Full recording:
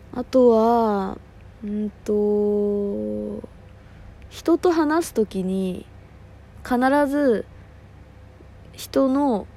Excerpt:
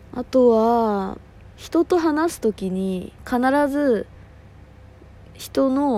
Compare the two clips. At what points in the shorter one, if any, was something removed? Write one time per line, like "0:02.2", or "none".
0:01.6
0:03.2